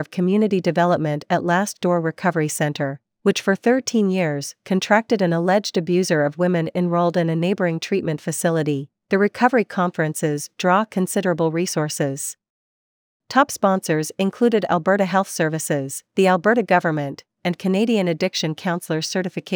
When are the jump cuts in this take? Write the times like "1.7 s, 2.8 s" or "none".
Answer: 17.4 s